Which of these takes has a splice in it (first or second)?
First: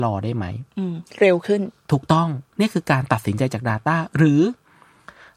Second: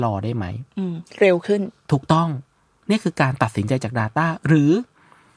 first